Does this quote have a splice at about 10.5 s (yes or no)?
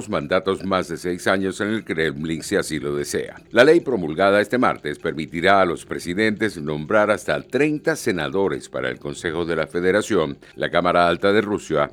no